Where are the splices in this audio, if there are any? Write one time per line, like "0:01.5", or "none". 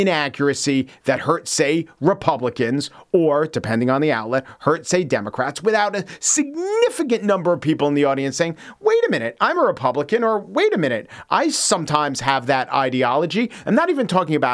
0:13.6